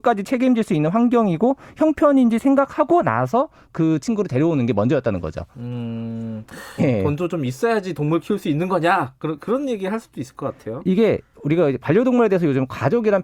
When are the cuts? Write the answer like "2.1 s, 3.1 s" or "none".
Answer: 6.8 s